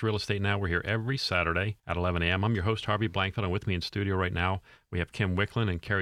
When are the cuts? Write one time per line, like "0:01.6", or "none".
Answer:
0:01.8

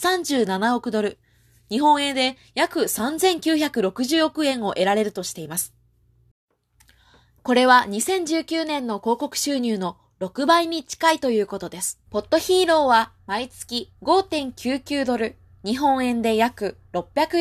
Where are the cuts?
0:12.1
0:14.0

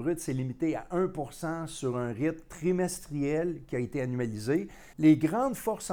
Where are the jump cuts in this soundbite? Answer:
0:04.9

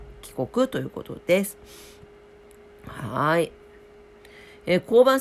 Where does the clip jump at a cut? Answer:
none

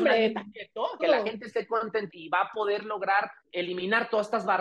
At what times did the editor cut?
0:01.0
0:02.1
0:03.4

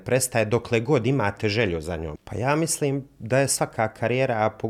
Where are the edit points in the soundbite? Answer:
0:02.2

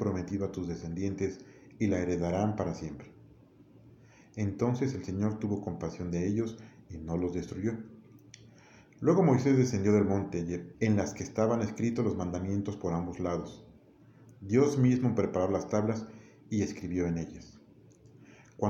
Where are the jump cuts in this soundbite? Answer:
0:10.7

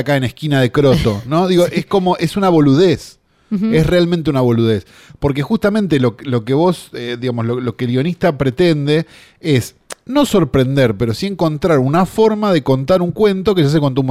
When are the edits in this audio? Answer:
none

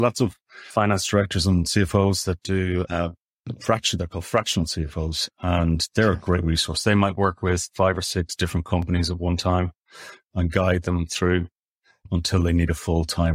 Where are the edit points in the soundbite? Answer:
none

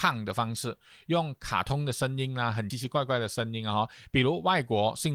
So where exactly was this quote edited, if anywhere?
0:02.7

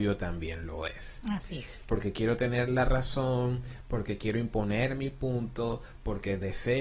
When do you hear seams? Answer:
0:01.9

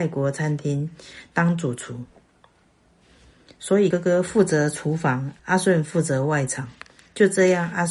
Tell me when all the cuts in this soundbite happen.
0:03.9
0:05.4

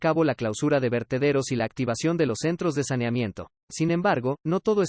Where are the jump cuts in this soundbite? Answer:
0:03.6

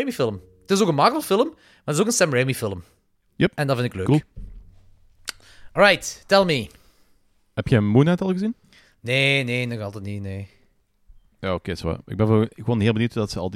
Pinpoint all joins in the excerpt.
none

